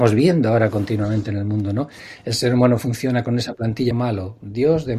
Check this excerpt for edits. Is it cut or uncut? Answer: cut